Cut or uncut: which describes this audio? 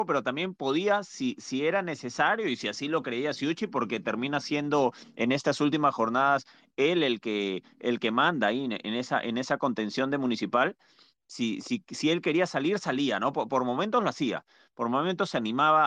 uncut